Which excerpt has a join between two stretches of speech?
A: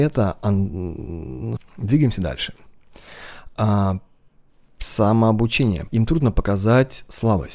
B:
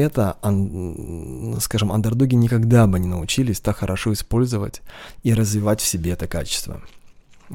A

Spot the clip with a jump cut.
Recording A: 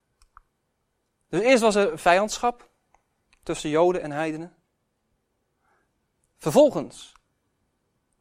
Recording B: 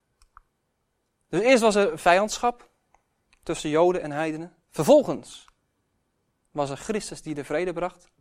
B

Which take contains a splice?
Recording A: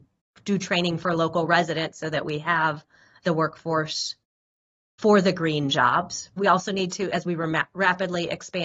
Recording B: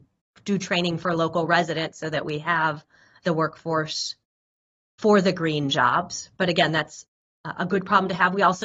A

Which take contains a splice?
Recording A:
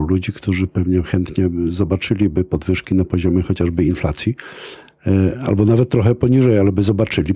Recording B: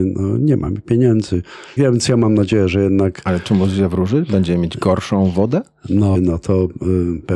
B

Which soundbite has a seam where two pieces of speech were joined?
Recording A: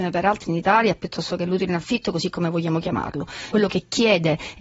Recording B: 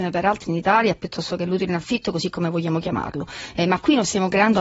A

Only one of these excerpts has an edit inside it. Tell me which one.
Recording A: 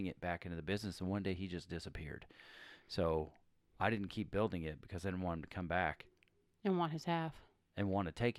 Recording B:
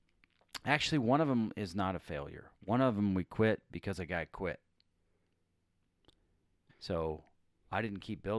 B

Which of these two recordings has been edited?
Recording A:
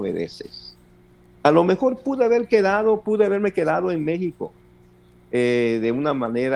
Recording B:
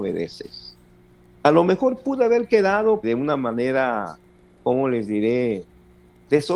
B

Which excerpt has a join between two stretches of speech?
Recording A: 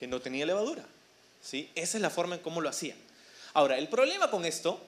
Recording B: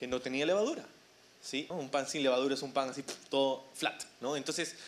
B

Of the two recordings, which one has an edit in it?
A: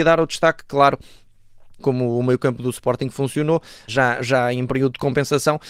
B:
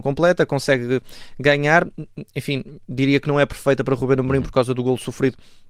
A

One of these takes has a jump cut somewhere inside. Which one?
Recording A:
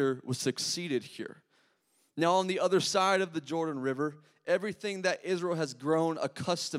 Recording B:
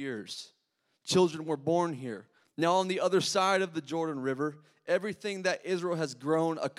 B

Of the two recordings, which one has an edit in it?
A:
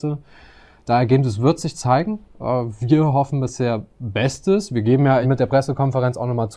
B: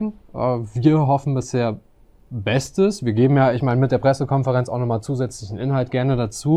A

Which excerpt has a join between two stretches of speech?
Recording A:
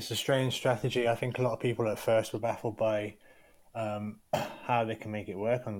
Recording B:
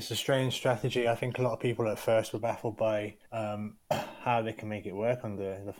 B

